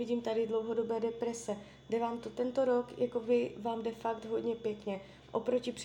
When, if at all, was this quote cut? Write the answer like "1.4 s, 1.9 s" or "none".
none